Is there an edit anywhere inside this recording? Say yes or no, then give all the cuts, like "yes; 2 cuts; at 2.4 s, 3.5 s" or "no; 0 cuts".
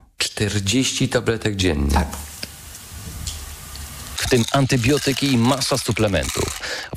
yes; 1 cut; at 4.2 s